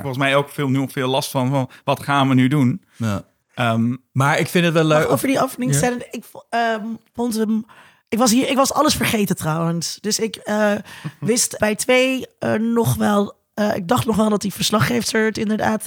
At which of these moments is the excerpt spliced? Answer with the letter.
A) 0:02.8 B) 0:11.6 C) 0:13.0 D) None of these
B